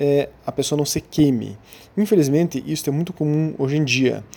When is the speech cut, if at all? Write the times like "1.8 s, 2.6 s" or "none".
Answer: none